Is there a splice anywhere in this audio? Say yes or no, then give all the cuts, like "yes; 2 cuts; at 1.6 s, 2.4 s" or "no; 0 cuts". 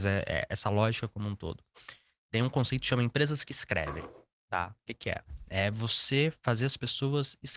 no; 0 cuts